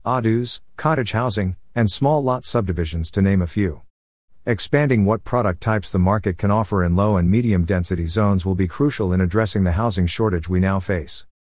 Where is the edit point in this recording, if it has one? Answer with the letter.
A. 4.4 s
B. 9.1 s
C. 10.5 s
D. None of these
D